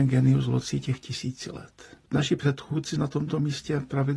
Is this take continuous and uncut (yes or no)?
no